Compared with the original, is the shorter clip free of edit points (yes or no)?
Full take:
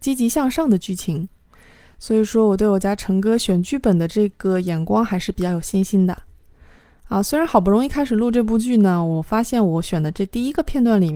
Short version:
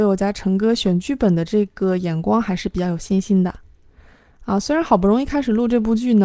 yes